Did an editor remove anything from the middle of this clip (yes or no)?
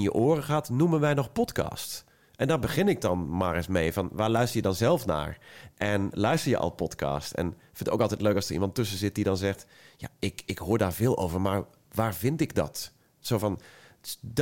no